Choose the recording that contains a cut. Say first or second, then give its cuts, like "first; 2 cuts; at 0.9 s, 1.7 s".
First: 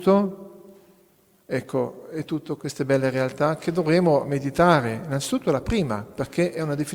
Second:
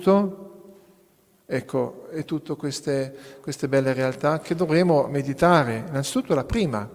first; 1 cut; at 2.6 s